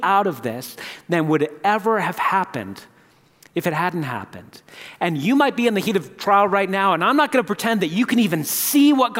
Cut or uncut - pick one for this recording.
uncut